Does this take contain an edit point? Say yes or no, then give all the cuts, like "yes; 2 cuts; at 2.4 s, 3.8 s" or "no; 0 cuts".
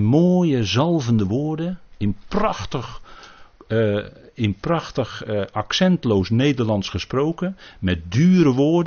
no; 0 cuts